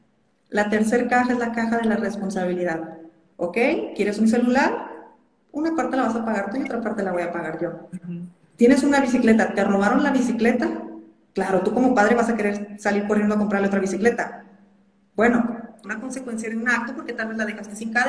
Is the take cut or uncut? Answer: cut